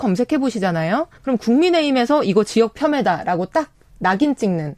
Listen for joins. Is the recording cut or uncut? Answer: cut